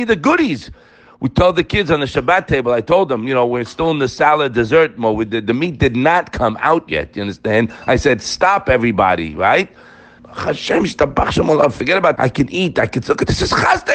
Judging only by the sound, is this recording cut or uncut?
cut